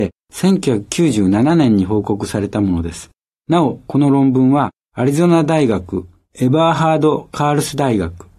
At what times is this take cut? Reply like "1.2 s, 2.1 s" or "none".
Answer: 3.4 s